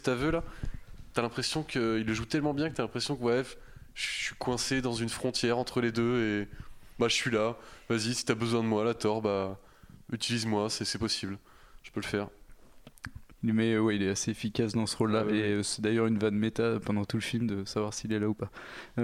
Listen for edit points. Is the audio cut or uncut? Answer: cut